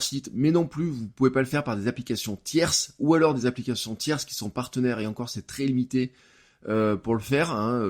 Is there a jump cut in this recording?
no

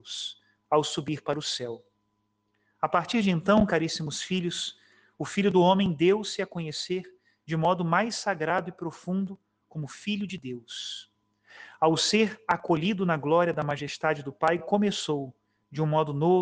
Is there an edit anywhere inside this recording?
no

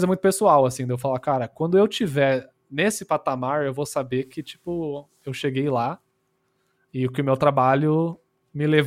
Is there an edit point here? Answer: no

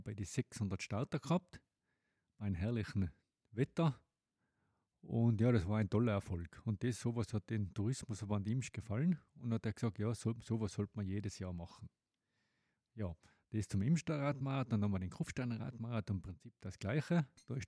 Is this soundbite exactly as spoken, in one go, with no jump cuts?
yes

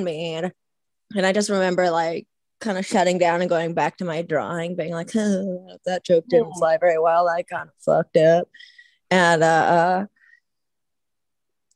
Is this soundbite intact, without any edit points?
yes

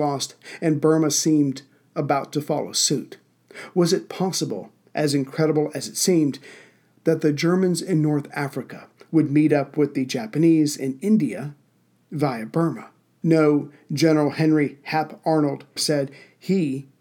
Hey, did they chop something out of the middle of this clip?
yes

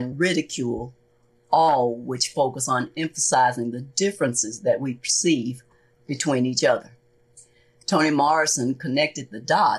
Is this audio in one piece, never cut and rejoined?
yes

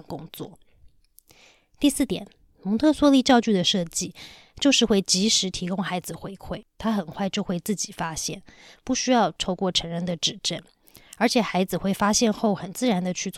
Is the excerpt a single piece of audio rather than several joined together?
no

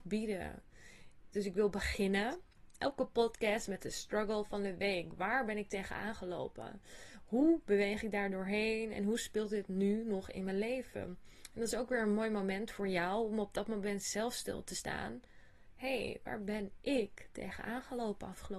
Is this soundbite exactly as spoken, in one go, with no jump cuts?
no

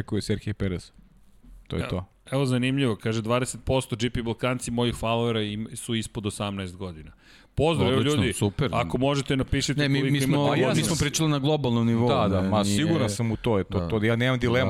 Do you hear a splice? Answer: no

